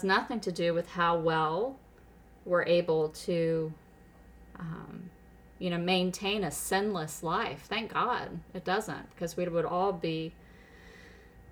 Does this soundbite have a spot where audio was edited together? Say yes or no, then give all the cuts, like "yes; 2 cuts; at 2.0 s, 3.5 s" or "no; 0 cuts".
no; 0 cuts